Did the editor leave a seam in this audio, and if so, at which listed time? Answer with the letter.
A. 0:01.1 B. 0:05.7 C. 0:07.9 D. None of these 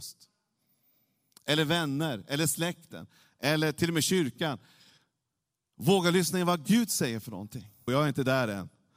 C